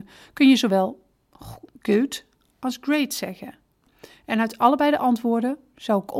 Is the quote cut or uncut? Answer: uncut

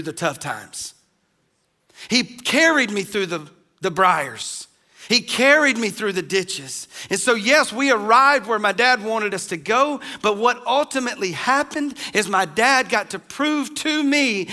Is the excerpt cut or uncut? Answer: uncut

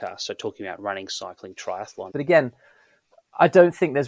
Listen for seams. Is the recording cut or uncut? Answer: cut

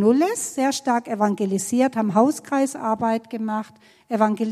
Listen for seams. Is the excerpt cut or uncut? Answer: uncut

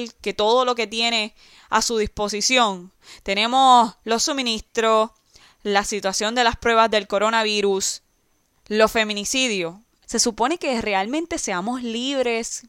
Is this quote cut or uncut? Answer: cut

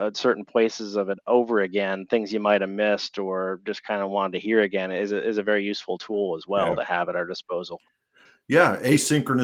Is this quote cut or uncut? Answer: uncut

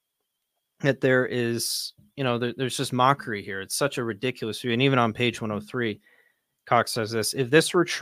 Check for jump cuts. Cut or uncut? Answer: uncut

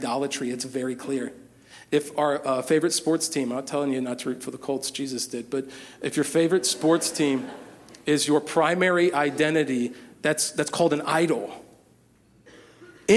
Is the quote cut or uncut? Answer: uncut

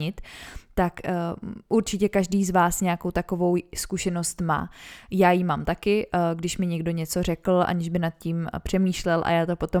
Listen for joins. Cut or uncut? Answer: uncut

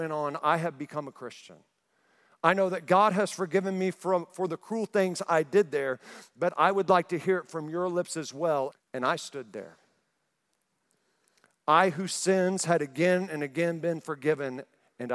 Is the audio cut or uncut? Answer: cut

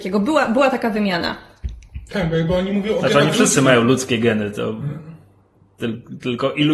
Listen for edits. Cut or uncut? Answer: uncut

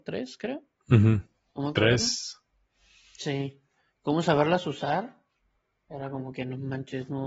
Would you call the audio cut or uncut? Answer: uncut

